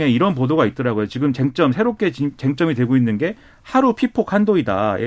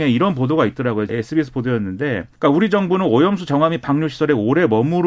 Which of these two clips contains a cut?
second; 2 cuts; at 1.1 s, 2.3 s

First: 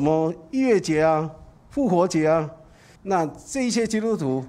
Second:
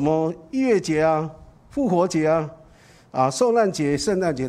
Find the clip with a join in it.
first; 1 cut; at 3.0 s

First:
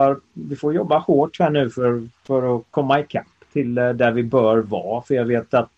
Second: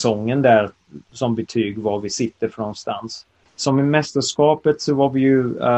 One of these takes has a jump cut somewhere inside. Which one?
second; 1 cut; at 3.5 s

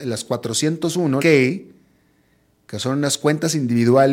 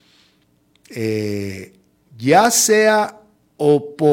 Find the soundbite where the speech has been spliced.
first; 1 cut; at 1.2 s

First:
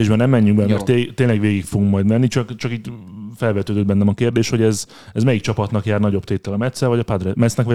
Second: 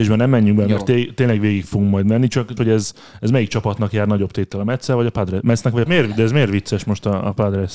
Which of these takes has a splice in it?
second; 2 cuts; at 2.6 s, 5.9 s

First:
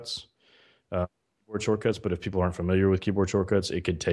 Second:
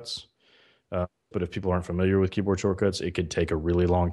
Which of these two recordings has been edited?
second; 1 cut; at 1.3 s

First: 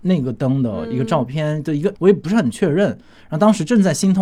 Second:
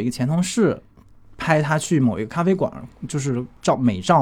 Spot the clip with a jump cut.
first; 1 cut; at 1.9 s

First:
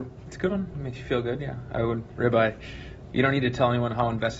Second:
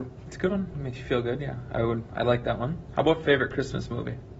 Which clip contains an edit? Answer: first; 2 cuts; at 2.1 s, 3.1 s

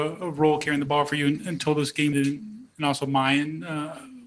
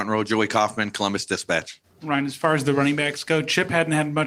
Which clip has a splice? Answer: first; 1 cut; at 2.1 s

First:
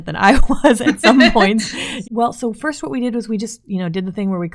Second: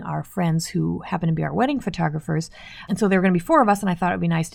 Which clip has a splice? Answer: first; 1 cut; at 2.0 s

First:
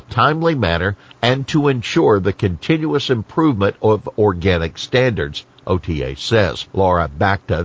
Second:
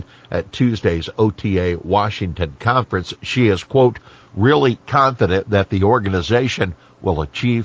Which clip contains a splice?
first; 1 cut; at 6.7 s

